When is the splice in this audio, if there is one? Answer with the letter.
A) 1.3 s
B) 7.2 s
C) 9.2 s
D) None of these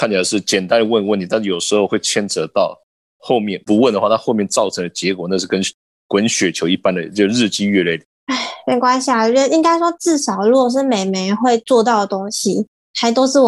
D